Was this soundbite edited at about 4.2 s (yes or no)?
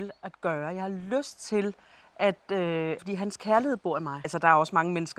yes